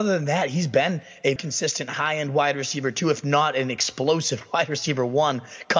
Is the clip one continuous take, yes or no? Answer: no